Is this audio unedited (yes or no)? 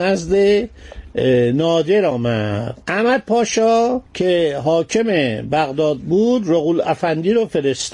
no